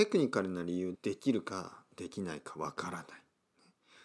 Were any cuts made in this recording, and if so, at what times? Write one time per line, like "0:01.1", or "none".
0:00.9